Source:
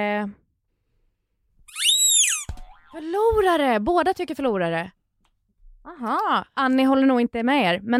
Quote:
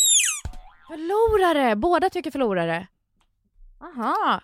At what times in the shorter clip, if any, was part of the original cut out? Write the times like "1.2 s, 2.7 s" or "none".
none